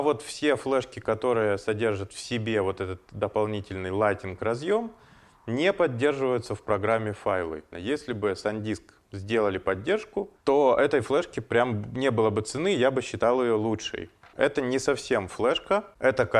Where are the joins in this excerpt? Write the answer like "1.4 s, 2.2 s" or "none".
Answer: 7.7 s, 14.3 s